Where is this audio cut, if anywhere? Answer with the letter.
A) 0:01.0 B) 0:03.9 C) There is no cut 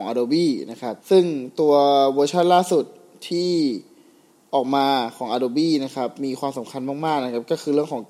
A